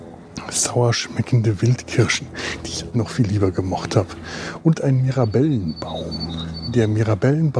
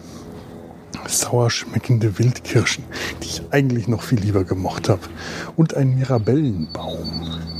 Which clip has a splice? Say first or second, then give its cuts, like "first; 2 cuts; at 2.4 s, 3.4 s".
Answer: first; 1 cut; at 2.9 s